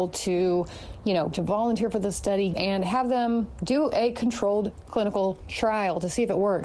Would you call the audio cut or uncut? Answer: cut